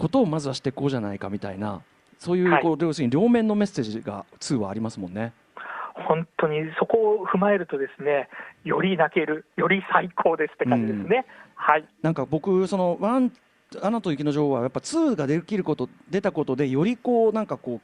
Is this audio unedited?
yes; 0 cuts

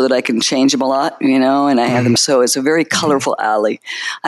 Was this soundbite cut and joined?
yes; 1 cut; at 2.2 s

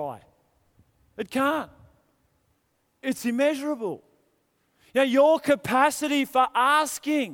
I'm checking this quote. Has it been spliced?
no; 0 cuts

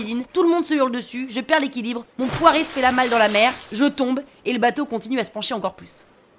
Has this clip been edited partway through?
no; 0 cuts

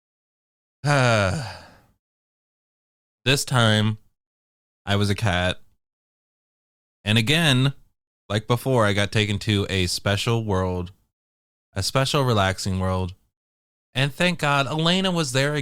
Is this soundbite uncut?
yes; 0 cuts

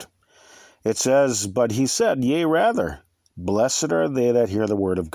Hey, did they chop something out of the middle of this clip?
no; 0 cuts

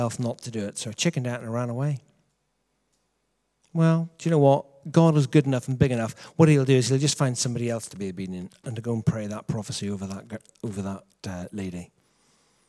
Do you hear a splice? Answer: no; 0 cuts

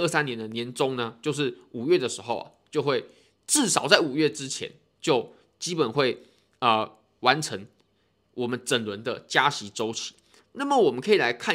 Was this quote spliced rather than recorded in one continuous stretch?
no; 0 cuts

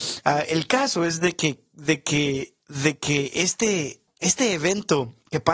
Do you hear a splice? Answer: no; 0 cuts

